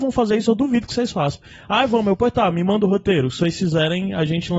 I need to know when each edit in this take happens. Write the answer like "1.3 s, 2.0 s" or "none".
none